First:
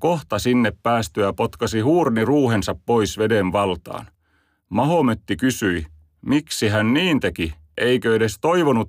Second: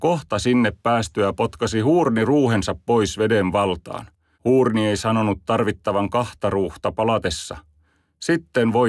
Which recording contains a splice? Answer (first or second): second